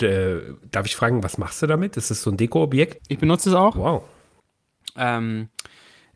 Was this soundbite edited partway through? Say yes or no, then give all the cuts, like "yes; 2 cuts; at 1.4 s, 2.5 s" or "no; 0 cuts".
yes; 1 cut; at 3.0 s